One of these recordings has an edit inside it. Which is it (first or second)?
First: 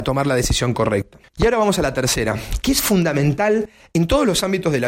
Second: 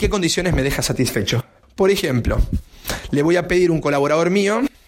first